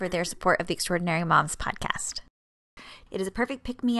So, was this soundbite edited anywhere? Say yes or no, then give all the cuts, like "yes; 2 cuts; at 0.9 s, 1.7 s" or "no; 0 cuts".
yes; 1 cut; at 3.1 s